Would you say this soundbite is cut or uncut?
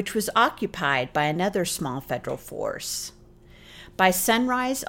uncut